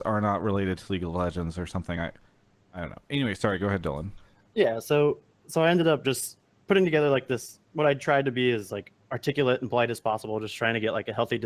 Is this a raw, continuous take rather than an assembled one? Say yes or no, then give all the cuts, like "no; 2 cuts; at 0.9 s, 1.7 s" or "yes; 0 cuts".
yes; 0 cuts